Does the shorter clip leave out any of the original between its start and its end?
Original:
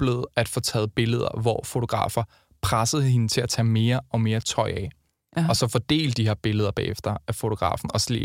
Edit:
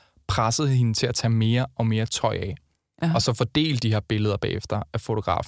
no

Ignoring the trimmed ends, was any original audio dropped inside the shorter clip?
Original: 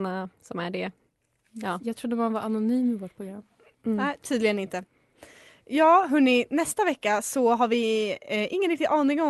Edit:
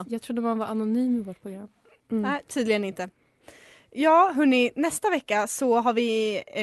no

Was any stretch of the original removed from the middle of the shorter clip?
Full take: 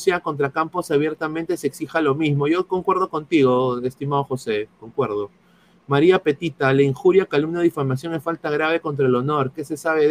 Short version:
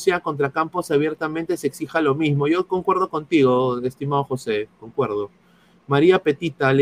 no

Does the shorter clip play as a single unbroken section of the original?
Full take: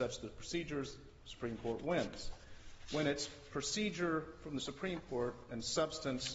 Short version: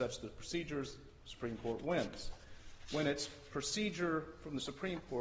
yes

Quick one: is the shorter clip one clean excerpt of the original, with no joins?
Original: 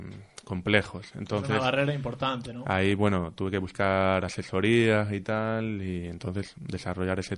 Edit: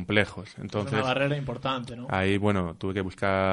yes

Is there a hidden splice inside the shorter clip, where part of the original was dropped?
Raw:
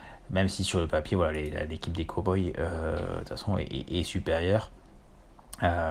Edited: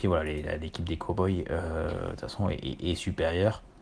no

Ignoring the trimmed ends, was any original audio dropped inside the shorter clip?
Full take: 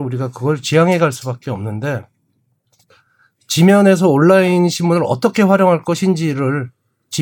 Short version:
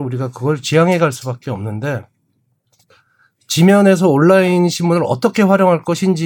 no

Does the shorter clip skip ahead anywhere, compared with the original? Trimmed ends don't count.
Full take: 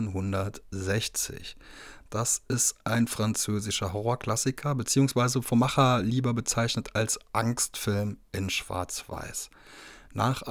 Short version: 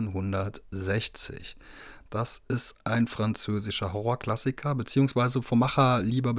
no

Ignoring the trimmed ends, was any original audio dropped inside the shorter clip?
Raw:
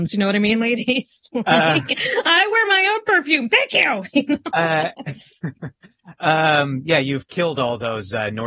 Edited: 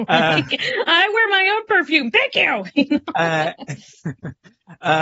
no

